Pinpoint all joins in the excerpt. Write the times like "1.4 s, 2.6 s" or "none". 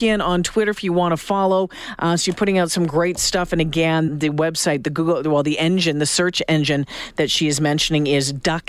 4.1 s

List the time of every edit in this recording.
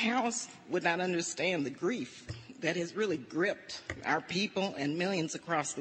none

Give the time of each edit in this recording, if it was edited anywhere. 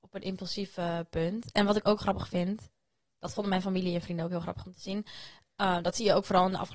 none

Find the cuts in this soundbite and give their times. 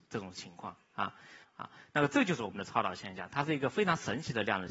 1.4 s

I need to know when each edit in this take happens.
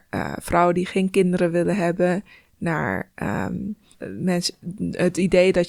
3.9 s

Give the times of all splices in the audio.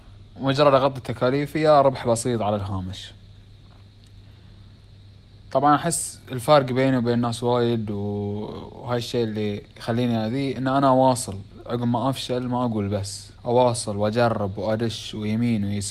9.7 s, 13.4 s

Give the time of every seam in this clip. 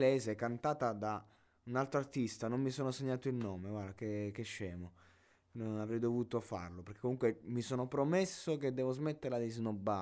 none

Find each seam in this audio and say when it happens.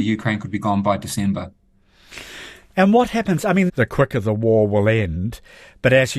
3.7 s

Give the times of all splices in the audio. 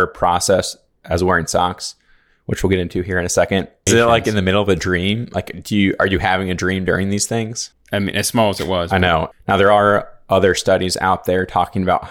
3.9 s, 7.7 s, 9.3 s

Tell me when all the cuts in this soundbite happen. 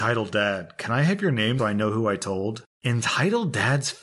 1.6 s

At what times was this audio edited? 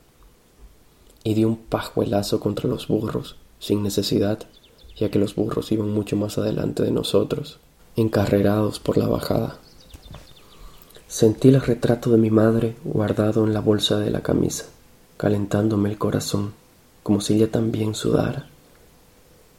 none

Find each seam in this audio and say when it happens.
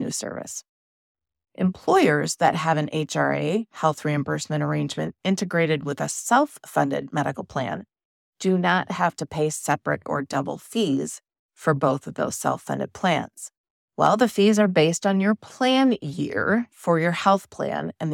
13.7 s

